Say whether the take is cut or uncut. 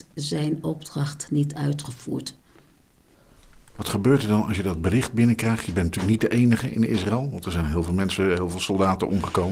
uncut